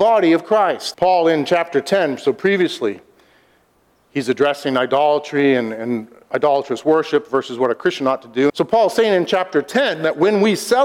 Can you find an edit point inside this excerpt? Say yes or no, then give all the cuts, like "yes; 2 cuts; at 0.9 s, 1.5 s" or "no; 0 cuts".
yes; 2 cuts; at 0.9 s, 8.5 s